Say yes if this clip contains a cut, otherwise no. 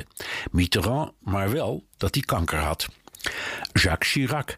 yes